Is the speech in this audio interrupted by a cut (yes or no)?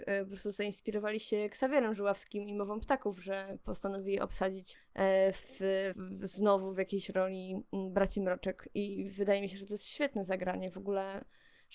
yes